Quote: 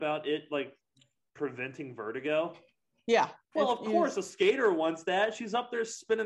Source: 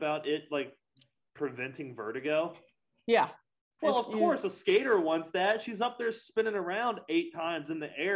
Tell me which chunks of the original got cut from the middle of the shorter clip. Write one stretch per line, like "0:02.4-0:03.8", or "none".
0:03.4-0:03.7